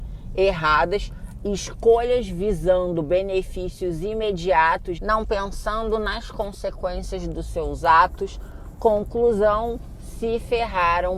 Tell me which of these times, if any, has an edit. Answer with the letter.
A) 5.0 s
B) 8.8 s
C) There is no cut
A